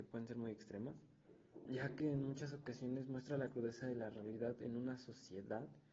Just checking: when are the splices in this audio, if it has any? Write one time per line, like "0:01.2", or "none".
0:01.7